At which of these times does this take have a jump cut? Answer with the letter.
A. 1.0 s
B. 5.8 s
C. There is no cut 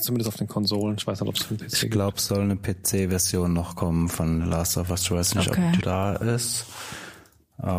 B